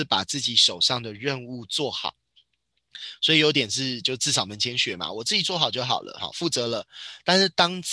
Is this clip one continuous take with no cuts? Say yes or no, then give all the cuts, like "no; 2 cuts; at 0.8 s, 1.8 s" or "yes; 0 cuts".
yes; 0 cuts